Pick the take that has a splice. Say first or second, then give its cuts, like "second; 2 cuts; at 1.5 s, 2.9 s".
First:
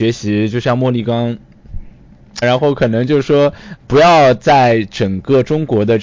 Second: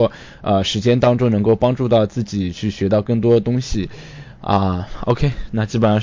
first; 2 cuts; at 2.4 s, 3.8 s